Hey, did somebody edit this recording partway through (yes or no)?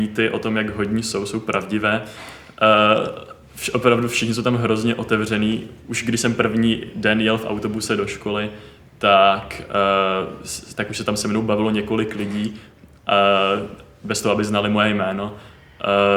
no